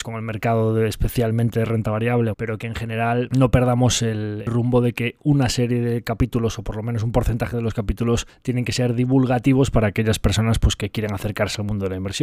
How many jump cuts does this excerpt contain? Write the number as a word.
one